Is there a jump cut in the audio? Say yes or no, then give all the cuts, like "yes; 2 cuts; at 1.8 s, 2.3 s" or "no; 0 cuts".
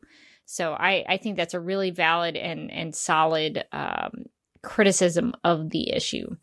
no; 0 cuts